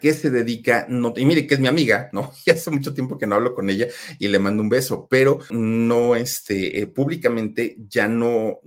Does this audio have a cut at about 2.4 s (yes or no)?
no